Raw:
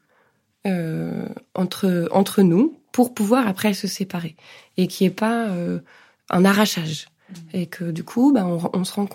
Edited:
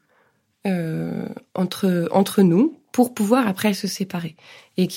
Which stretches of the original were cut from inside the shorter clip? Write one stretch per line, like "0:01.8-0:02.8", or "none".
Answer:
none